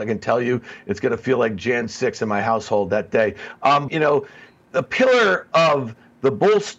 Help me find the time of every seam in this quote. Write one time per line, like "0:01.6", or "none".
0:03.9